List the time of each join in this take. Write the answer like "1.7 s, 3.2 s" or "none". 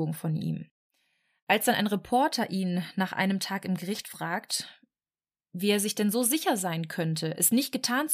none